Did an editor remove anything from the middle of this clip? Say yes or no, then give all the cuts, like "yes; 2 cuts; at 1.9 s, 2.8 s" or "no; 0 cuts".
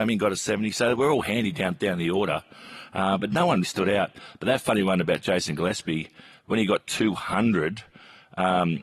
yes; 1 cut; at 3.6 s